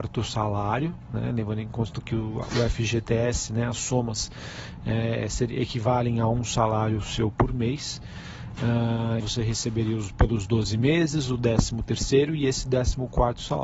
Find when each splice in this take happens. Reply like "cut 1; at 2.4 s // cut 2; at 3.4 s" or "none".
cut 1; at 9.2 s